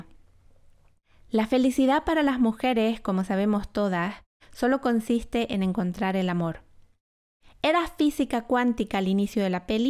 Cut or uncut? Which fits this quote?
uncut